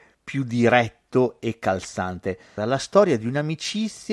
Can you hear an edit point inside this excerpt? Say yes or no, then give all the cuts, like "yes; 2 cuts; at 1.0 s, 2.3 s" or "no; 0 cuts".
yes; 1 cut; at 2.6 s